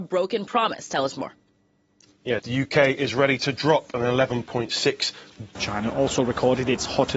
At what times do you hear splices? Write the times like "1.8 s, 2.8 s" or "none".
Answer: 2.4 s, 5.5 s